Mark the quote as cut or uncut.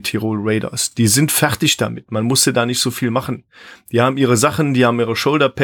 uncut